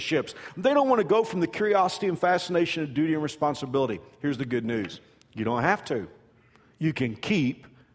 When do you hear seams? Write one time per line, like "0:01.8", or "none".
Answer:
none